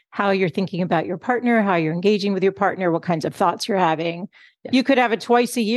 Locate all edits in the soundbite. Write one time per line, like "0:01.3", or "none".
0:04.7